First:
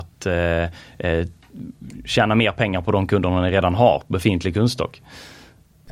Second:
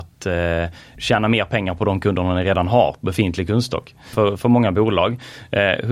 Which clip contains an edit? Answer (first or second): second